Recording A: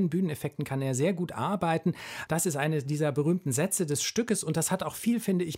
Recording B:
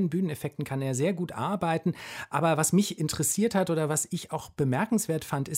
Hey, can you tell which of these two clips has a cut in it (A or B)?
A